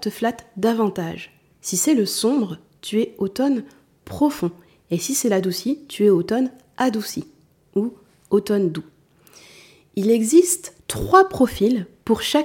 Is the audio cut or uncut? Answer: cut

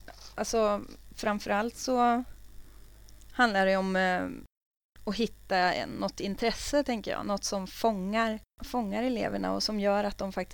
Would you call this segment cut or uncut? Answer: uncut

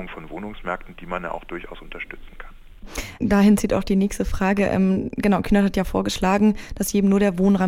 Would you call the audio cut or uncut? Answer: uncut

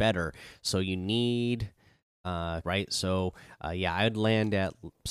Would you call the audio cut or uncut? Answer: cut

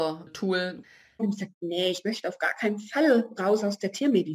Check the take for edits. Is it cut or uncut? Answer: cut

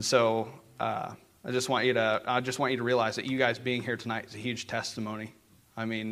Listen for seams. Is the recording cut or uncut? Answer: uncut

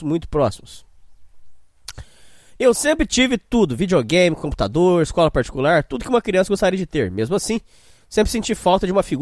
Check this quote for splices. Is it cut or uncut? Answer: uncut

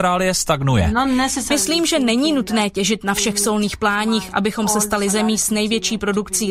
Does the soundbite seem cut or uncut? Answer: uncut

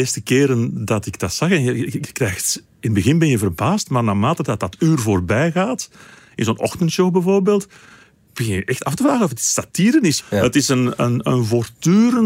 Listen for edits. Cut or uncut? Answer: uncut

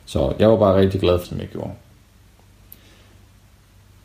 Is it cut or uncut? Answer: cut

